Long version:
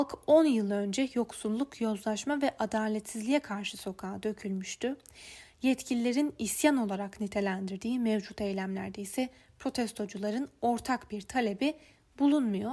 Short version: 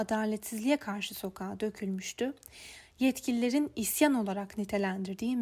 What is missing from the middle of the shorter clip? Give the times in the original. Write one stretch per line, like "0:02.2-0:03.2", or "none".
none